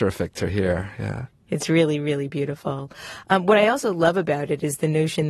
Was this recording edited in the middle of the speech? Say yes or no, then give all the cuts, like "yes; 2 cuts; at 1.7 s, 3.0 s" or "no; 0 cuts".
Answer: no; 0 cuts